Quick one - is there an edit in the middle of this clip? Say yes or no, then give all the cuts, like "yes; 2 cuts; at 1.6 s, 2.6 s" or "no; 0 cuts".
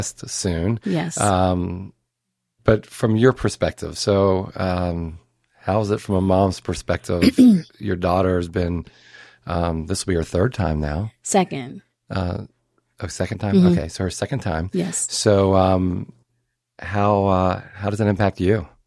no; 0 cuts